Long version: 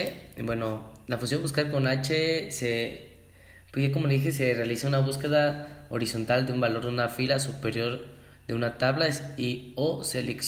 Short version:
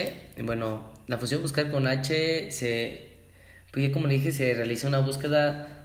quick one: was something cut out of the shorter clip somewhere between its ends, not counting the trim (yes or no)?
no